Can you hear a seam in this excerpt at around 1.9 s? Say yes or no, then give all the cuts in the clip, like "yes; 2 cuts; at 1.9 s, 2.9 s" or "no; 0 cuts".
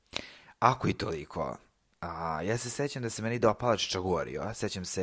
no; 0 cuts